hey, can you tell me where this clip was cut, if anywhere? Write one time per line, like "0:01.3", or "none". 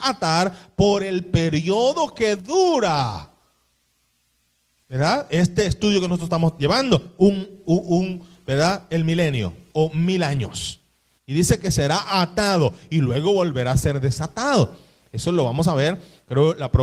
none